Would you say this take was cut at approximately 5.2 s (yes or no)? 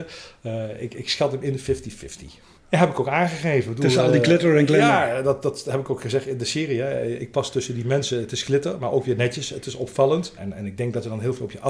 no